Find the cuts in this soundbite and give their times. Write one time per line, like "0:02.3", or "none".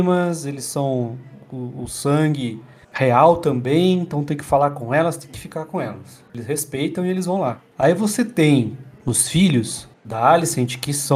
0:06.3